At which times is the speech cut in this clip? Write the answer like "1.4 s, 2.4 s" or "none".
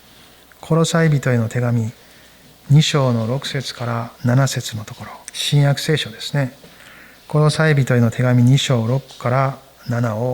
4.2 s, 5.2 s